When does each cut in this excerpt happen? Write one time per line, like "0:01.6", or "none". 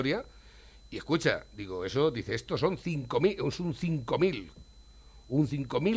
none